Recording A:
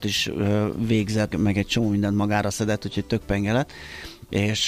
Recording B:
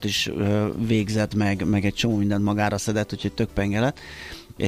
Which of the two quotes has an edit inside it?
A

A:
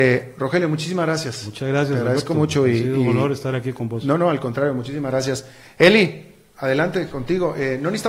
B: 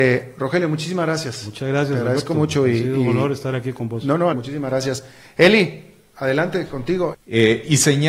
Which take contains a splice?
B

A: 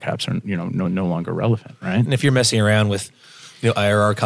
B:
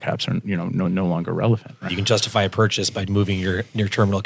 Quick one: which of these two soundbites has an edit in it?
B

